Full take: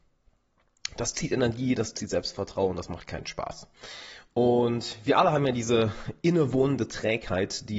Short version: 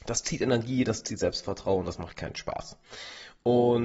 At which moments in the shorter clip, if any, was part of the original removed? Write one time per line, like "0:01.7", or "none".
none